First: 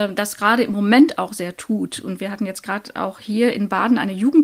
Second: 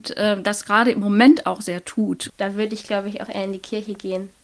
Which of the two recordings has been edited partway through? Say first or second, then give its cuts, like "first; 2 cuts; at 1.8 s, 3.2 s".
second; 1 cut; at 2.3 s